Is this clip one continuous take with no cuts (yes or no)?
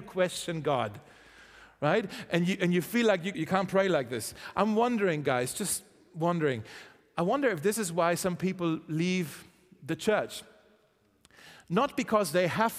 no